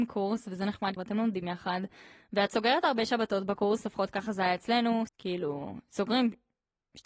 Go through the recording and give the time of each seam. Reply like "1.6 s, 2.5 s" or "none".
1.0 s, 5.1 s